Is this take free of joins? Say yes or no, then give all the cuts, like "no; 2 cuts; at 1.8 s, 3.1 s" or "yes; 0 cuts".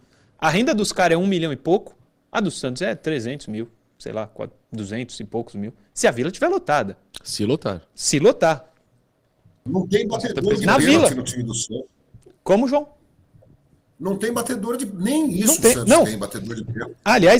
no; 1 cut; at 9.7 s